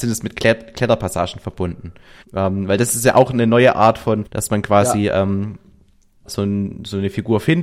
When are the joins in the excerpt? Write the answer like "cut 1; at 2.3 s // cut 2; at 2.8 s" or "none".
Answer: cut 1; at 2.2 s // cut 2; at 4.3 s // cut 3; at 6.3 s